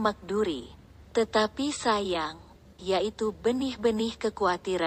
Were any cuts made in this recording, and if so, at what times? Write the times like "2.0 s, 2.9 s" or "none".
1.0 s, 2.8 s